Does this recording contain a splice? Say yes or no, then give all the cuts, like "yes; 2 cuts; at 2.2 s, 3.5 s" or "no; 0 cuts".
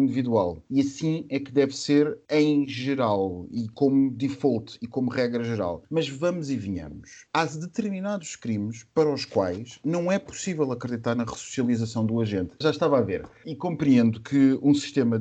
yes; 1 cut; at 12.6 s